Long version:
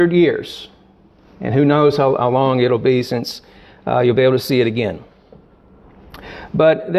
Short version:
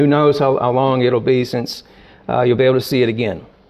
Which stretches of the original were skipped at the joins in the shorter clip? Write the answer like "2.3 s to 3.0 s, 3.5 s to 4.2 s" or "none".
none